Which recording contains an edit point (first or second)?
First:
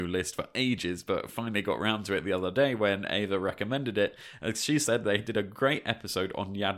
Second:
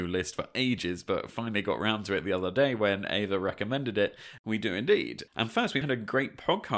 second